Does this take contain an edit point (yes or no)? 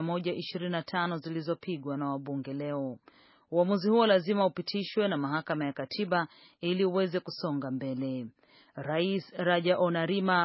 no